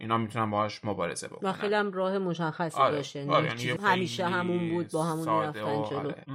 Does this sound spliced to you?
yes; 1 cut; at 3.8 s

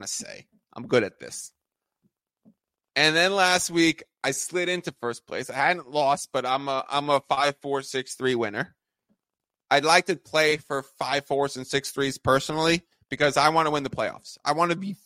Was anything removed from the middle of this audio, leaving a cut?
no; 0 cuts

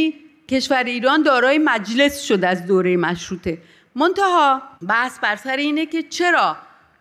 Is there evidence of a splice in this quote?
yes; 1 cut; at 4.8 s

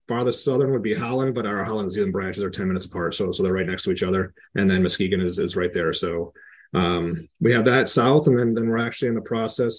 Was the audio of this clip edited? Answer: yes; 1 cut; at 4.4 s

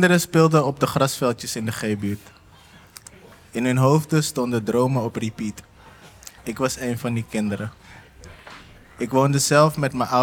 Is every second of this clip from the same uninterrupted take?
no; 1 cut; at 6.4 s

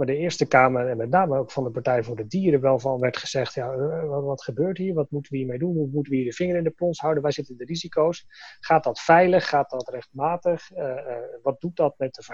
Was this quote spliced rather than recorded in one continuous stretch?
no; 0 cuts

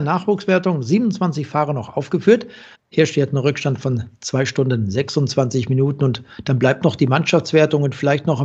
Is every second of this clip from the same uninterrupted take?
no; 1 cut; at 2.7 s

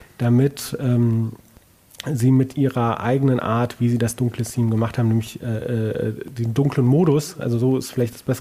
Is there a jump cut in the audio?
no; 0 cuts

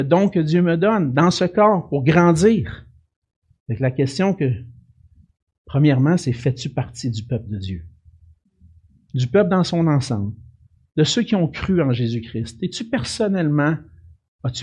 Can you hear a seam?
no; 0 cuts

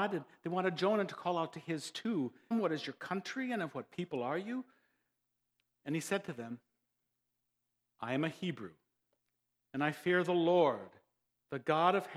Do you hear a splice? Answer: yes; 1 cut; at 2.5 s

